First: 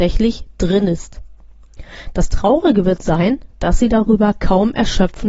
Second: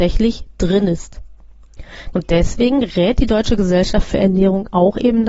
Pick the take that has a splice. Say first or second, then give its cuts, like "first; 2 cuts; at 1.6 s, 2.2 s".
second; 1 cut; at 2.1 s